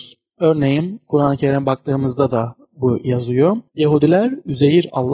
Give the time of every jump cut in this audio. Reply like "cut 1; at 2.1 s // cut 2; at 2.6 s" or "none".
cut 1; at 3.7 s